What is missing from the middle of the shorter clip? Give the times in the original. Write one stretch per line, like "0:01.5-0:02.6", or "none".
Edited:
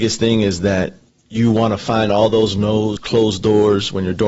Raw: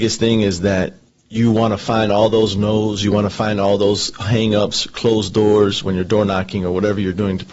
0:03.0-0:04.9